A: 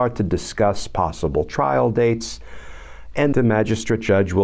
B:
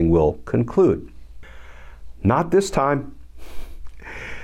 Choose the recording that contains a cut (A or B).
A